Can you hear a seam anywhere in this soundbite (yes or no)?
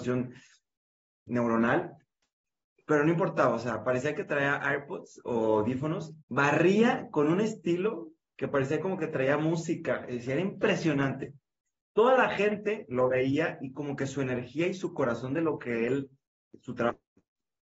yes